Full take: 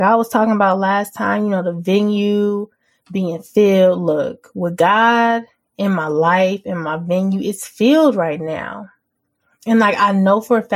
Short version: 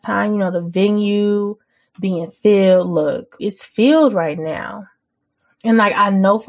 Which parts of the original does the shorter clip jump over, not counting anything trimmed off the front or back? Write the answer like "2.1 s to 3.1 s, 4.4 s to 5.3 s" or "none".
4.5 s to 7.4 s

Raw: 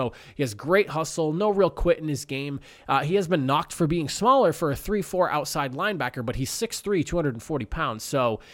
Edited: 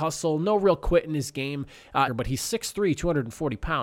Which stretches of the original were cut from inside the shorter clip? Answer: 3.0 s to 6.2 s

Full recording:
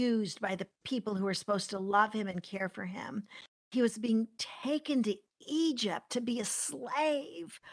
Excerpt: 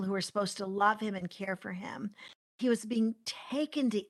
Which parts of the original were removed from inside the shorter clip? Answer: none

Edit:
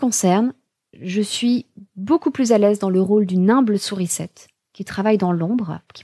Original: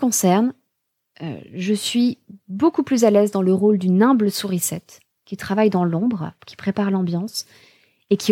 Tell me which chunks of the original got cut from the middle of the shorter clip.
0.9 s to 1.5 s

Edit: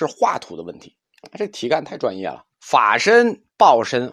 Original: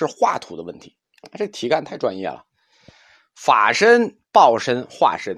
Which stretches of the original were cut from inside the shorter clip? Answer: 2.5 s to 3.3 s

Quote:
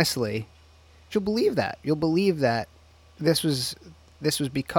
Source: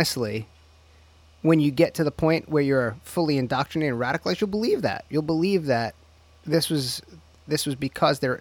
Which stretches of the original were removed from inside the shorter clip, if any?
1.1 s to 4.4 s

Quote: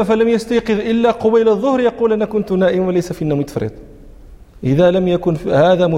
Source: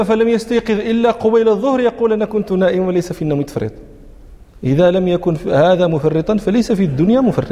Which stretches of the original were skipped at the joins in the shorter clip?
none

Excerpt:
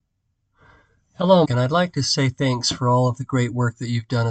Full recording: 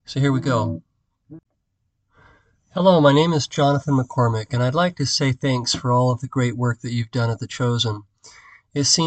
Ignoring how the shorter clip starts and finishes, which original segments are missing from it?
3.0 s to 4.5 s

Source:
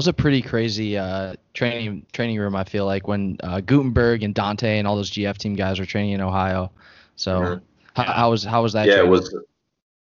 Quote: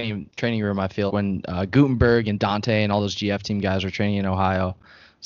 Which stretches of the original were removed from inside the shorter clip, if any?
2.8 s to 3.0 s

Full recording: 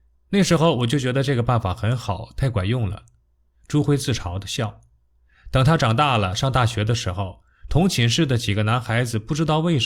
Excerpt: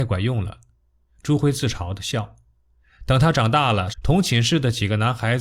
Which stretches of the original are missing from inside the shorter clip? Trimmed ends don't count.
6.4 s to 7.6 s

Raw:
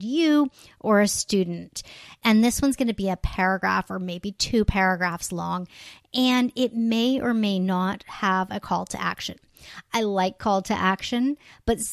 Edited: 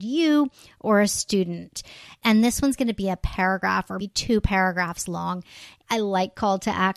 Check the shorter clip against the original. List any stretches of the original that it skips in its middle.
4.0 s to 4.2 s, 6.1 s to 9.8 s

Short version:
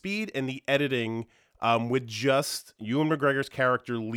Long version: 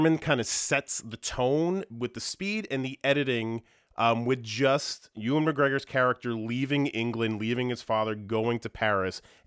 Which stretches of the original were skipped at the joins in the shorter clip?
none

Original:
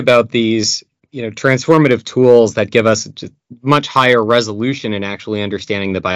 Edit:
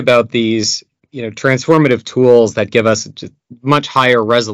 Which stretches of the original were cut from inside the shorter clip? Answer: none

